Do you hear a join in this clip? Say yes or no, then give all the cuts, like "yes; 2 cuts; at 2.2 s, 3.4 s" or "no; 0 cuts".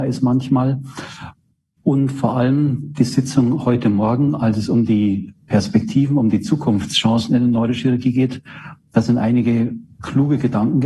no; 0 cuts